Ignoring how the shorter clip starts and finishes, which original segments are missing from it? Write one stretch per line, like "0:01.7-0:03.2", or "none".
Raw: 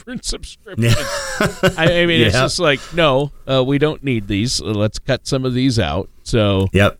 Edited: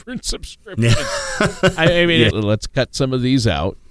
0:02.3-0:04.6